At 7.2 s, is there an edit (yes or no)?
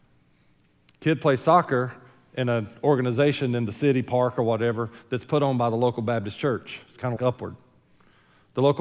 yes